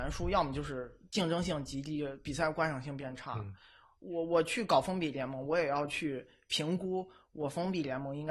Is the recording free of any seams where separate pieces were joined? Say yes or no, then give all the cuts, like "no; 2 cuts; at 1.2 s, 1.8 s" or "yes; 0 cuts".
yes; 0 cuts